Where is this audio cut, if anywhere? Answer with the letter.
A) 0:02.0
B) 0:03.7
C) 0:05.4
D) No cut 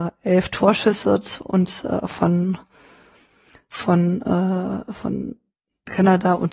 D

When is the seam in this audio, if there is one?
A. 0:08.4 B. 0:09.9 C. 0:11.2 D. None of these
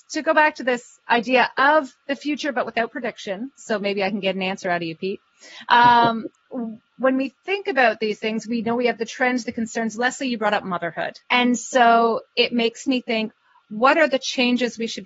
C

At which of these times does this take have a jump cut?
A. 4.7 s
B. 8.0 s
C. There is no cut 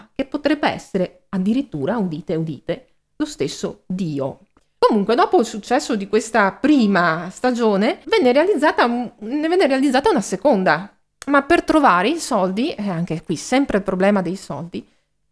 B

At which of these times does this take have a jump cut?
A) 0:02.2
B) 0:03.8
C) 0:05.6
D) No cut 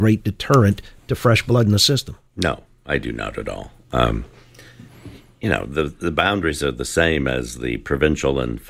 D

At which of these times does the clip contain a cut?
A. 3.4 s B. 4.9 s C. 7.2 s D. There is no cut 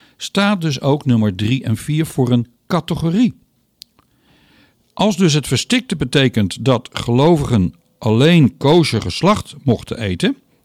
D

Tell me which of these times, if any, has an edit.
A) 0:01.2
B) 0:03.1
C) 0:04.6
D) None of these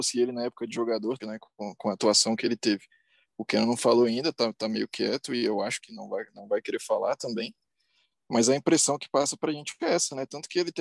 A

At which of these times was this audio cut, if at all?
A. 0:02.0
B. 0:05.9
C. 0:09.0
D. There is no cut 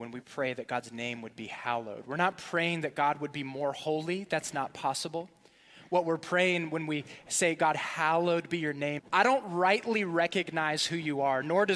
C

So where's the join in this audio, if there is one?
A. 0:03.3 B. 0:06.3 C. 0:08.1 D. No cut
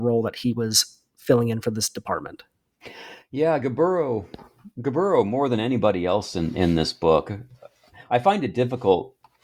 D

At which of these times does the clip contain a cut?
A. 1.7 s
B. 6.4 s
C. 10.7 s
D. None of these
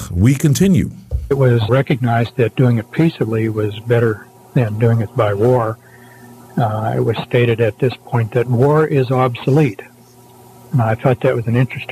A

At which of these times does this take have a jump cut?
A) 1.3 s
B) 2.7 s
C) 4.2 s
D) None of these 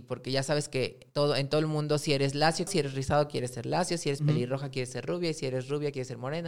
B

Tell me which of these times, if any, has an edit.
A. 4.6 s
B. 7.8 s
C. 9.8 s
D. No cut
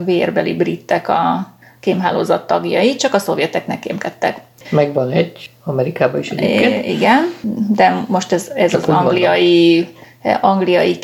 A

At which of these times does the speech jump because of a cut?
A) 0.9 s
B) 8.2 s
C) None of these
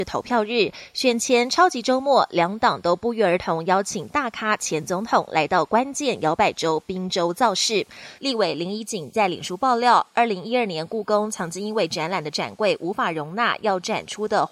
B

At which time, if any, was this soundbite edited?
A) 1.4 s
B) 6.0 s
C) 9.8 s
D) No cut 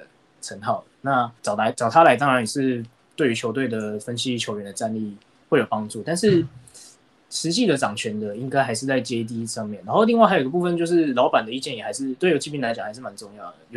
A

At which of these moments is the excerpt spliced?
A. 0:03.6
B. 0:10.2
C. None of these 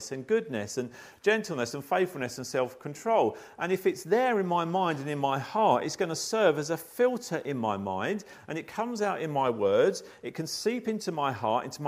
C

